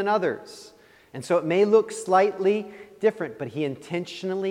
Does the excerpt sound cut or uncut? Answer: uncut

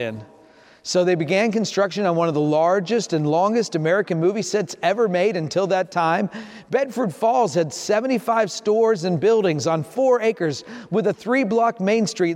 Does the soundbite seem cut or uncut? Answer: uncut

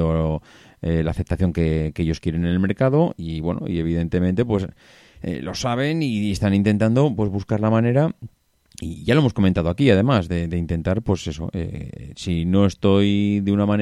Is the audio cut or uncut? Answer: uncut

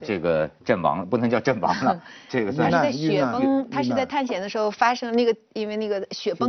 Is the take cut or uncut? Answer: uncut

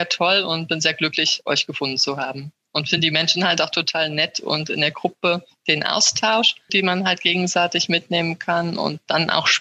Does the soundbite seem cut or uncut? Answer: cut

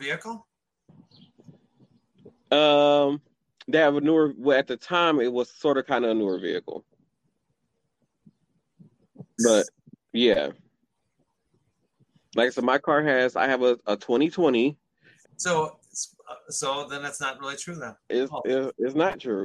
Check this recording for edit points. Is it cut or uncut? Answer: cut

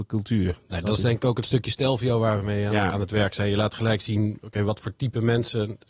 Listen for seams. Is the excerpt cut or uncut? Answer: cut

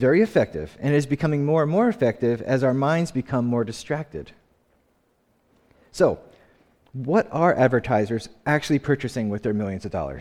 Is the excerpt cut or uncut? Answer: uncut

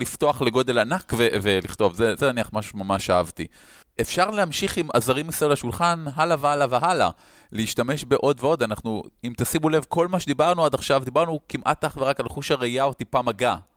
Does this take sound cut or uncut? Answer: uncut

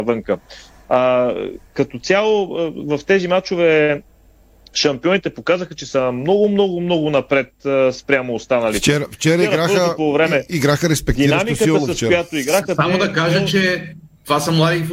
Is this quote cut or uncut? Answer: uncut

